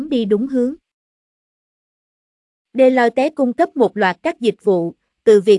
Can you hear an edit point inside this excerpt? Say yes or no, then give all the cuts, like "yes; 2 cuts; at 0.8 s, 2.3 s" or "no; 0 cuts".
yes; 1 cut; at 2.7 s